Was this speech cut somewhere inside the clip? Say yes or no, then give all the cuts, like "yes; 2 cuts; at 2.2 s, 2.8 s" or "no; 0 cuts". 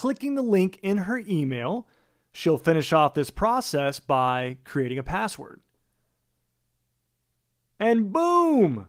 no; 0 cuts